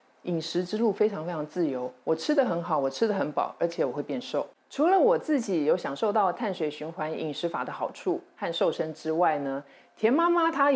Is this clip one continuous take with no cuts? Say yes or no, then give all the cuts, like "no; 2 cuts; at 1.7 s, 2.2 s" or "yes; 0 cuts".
yes; 0 cuts